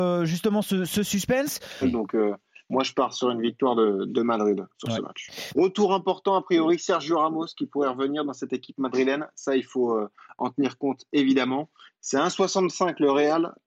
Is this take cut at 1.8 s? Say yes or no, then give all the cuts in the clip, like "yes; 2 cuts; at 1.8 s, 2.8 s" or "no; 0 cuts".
yes; 2 cuts; at 1.8 s, 5.5 s